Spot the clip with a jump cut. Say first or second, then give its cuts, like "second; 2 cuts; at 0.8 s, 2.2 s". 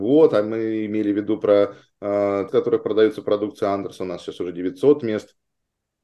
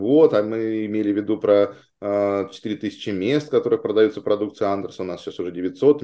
first; 1 cut; at 2.5 s